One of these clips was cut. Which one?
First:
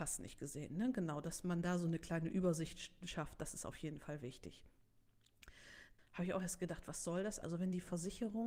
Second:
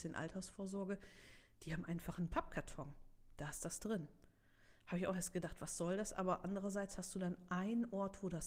first; 2 cuts; at 6.0 s, 7.4 s

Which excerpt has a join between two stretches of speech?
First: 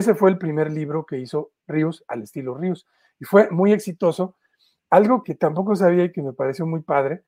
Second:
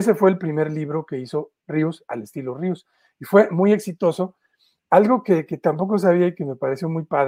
first; 1 cut; at 5.2 s

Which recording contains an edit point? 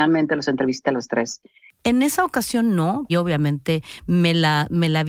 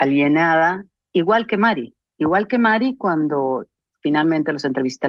first; 2 cuts; at 1.8 s, 3.1 s

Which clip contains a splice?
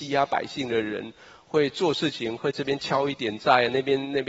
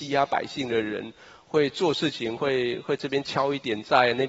first; 1 cut; at 2.4 s

